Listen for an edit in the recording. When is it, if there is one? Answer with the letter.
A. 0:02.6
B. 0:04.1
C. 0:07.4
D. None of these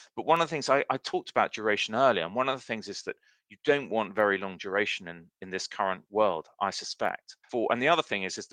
C